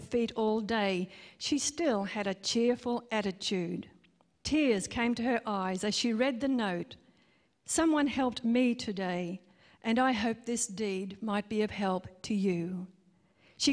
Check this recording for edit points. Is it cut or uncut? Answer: cut